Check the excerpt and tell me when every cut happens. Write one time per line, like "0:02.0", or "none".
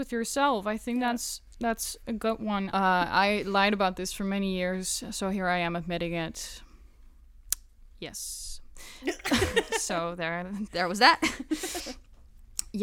0:02.7